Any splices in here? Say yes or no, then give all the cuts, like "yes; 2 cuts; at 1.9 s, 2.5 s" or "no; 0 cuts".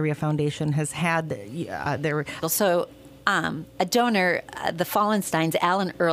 yes; 1 cut; at 2.4 s